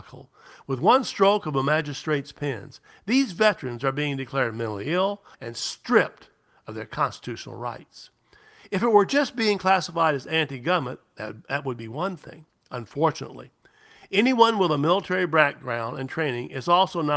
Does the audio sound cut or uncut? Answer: cut